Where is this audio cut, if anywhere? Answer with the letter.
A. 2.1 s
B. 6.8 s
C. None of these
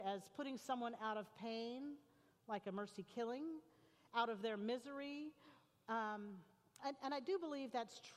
B